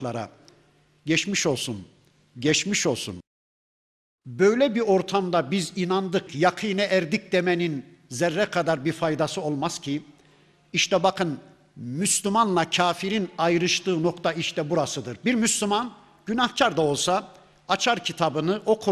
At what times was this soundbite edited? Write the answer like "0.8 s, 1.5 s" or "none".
6.3 s